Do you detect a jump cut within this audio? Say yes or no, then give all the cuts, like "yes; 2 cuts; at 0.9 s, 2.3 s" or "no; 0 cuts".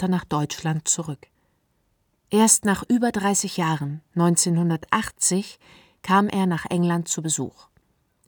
no; 0 cuts